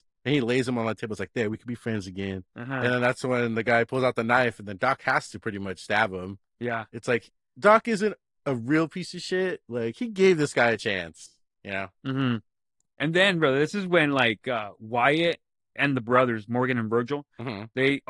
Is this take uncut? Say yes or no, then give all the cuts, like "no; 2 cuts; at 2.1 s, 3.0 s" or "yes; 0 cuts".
yes; 0 cuts